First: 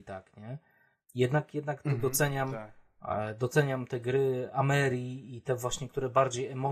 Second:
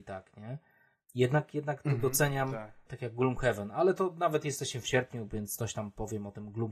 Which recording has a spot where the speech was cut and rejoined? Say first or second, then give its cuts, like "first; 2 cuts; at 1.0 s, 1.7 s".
second; 1 cut; at 2.9 s